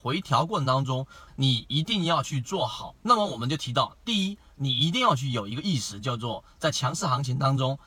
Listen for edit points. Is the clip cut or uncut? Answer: cut